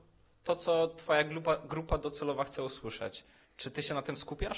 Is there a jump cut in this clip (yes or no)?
no